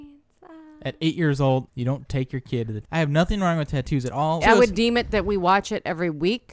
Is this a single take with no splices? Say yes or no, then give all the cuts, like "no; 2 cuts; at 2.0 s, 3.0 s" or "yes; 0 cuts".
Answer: no; 3 cuts; at 1.7 s, 2.8 s, 4.4 s